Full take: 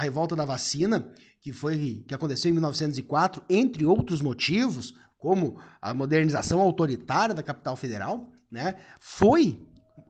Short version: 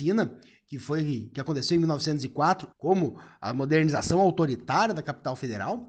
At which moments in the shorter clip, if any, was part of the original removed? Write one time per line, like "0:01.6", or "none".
0:02.7